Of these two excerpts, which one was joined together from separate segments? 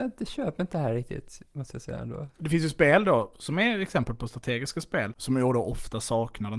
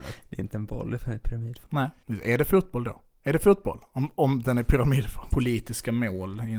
second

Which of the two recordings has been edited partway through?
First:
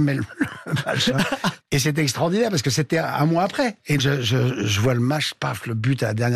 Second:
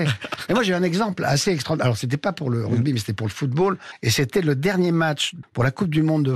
first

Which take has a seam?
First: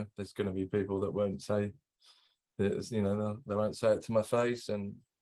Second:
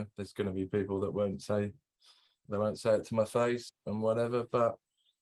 second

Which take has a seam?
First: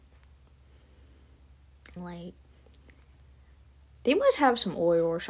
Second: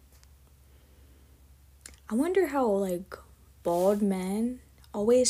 first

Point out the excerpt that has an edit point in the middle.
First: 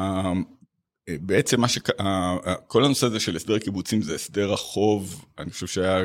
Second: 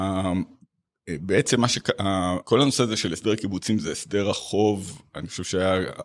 second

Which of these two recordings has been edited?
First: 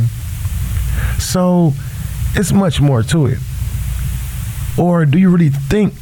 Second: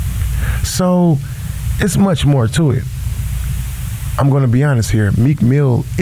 first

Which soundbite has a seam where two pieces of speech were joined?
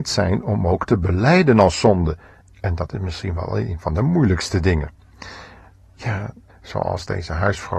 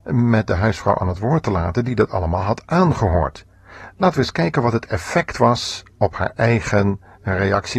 first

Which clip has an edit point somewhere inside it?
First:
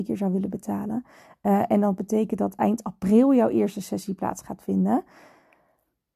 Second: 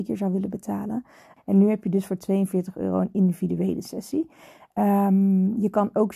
second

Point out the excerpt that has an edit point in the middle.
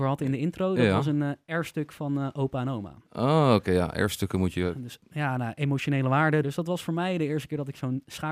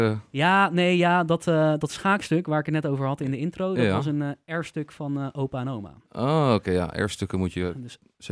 first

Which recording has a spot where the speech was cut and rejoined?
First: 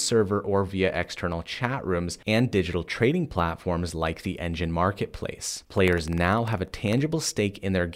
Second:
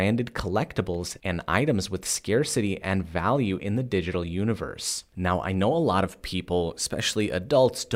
first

